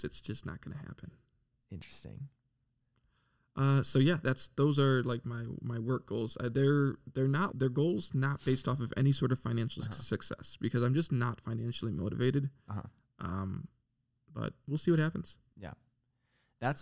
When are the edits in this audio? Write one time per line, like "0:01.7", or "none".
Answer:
0:07.5